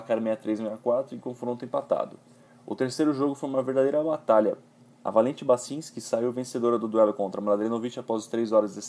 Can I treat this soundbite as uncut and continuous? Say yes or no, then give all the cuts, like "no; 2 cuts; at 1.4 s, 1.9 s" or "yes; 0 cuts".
yes; 0 cuts